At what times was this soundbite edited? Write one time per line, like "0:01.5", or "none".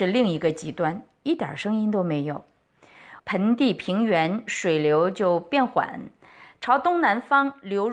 0:03.2